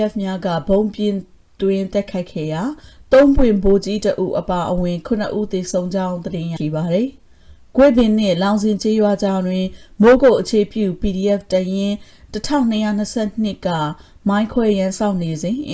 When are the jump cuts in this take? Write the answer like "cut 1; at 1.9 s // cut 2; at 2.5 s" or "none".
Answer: cut 1; at 6.6 s